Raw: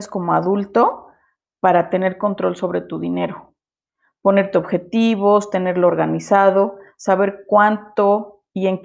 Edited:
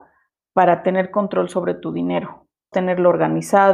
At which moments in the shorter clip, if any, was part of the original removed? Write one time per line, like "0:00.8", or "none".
0:02.7